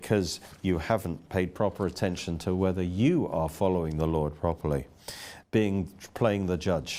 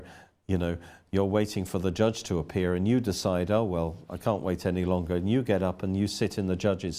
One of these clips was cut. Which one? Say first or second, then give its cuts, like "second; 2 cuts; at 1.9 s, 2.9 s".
first; 1 cut; at 5.4 s